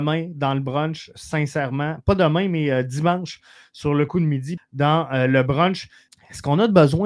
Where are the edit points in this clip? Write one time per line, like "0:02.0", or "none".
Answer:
0:04.6
0:06.1